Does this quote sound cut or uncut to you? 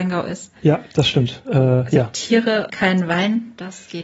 cut